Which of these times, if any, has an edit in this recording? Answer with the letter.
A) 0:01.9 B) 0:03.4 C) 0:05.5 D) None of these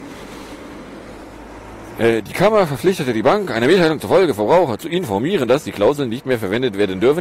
D